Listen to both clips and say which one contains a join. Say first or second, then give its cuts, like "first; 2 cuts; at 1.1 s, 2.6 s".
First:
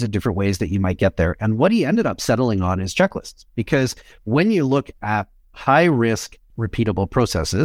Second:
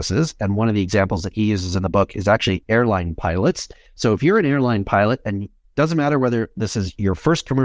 first; 1 cut; at 6.5 s